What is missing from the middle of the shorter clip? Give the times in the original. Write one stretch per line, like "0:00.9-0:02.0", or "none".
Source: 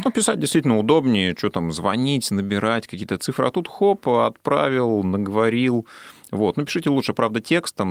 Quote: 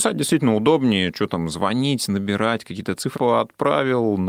0:03.4-0:04.0